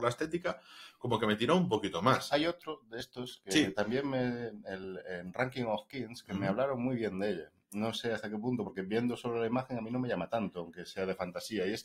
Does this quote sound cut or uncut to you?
uncut